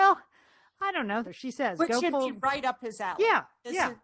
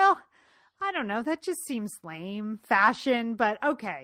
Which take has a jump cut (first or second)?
first